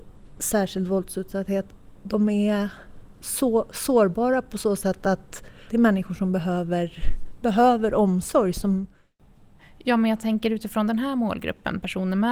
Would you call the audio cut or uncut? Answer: uncut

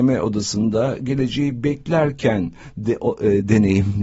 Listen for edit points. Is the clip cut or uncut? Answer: uncut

